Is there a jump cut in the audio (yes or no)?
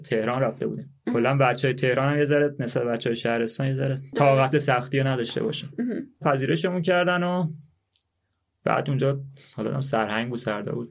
yes